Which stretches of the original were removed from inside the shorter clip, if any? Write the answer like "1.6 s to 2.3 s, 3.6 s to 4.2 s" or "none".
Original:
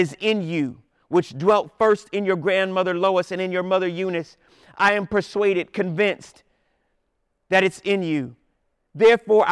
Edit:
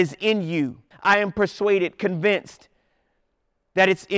0.9 s to 4.7 s